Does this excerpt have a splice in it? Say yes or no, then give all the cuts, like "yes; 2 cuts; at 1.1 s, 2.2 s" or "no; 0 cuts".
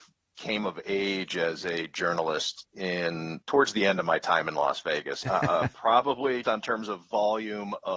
yes; 2 cuts; at 5.2 s, 6.4 s